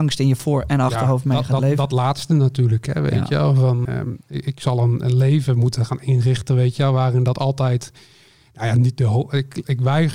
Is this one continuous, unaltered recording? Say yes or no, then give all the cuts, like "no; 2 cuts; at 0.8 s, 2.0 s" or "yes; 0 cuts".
no; 1 cut; at 3.9 s